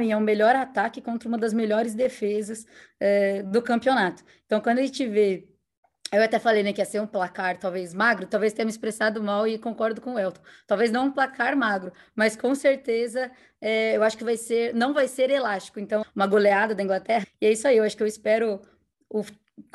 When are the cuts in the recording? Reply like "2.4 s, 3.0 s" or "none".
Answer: 16.0 s, 17.2 s